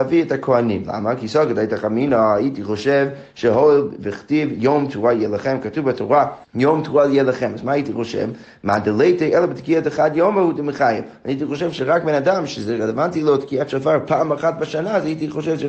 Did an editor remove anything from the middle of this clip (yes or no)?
yes